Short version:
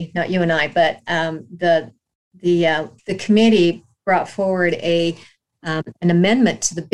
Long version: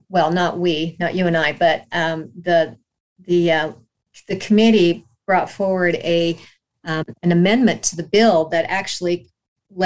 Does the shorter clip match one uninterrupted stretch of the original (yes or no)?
no